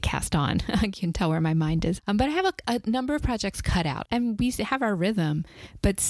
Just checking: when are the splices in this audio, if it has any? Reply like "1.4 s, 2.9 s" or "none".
2.0 s, 4.0 s